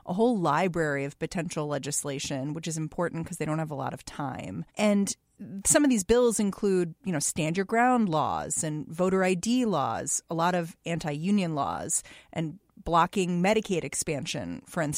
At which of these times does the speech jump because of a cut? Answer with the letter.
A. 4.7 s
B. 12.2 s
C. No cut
A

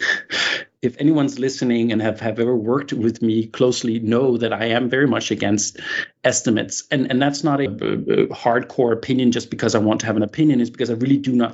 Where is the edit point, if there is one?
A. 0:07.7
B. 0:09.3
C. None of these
A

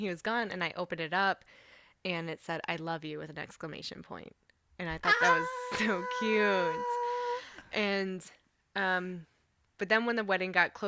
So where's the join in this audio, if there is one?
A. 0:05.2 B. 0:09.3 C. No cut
C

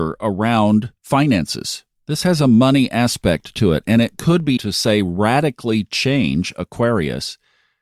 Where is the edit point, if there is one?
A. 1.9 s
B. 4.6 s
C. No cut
B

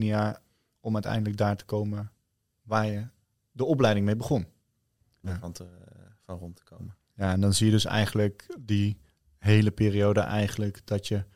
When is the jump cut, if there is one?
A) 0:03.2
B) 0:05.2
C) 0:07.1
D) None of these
B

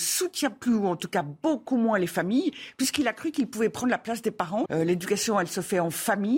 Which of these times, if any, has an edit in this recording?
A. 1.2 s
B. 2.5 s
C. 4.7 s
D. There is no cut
C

